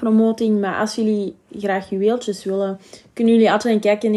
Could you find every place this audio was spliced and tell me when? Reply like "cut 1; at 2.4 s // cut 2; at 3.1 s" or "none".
none